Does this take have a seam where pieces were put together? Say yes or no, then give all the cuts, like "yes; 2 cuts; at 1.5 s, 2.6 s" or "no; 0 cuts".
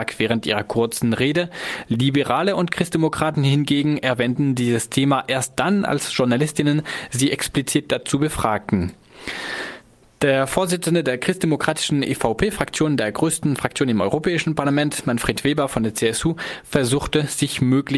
no; 0 cuts